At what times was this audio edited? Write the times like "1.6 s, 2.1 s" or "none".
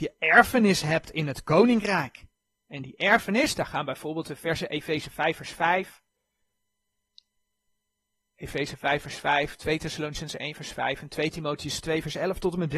none